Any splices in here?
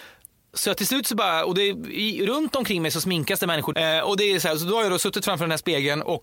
yes; 1 cut; at 3.7 s

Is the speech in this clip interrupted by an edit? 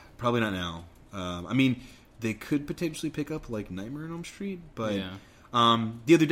no; 0 cuts

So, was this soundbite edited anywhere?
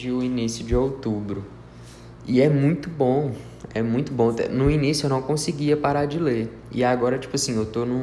yes; 1 cut; at 2.2 s

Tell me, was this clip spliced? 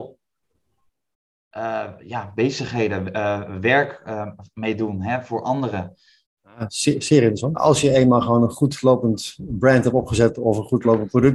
yes; 2 cuts; at 6.3 s, 7.5 s

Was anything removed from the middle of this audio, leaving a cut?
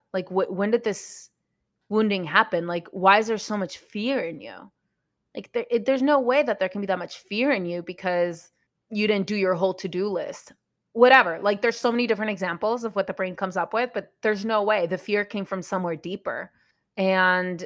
no; 0 cuts

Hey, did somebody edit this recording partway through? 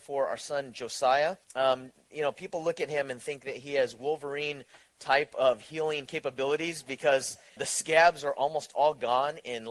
yes; 2 cuts; at 1.4 s, 7.6 s

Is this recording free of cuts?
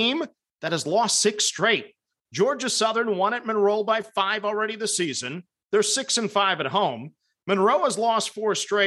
no; 1 cut; at 2.3 s

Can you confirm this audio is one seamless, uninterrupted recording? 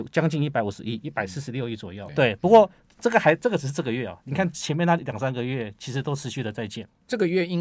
no; 1 cut; at 2.1 s

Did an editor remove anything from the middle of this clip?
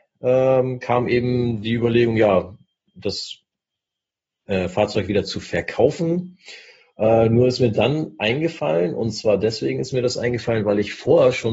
no; 0 cuts

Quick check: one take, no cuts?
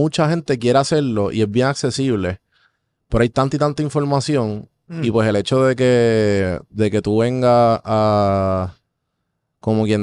yes; 0 cuts

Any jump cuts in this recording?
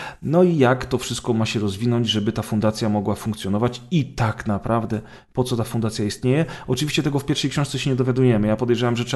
no; 0 cuts

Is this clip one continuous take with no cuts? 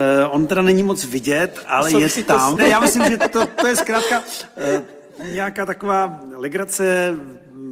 no; 1 cut; at 2.6 s

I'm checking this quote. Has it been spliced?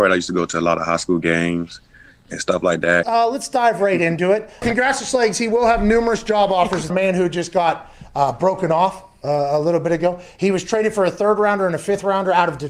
yes; 3 cuts; at 3.0 s, 4.6 s, 6.9 s

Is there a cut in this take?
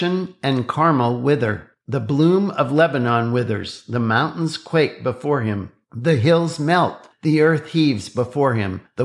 no; 0 cuts

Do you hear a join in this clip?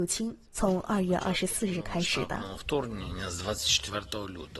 no; 0 cuts

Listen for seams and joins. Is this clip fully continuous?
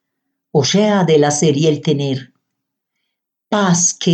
yes; 0 cuts

